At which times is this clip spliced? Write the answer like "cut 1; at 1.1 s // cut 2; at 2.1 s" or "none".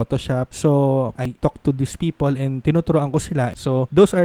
cut 1; at 1.2 s